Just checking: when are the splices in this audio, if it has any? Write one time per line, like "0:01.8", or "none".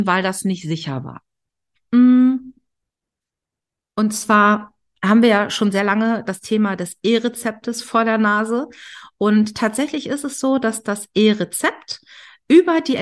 0:01.8